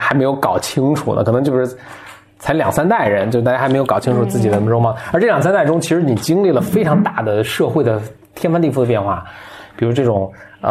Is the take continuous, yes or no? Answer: yes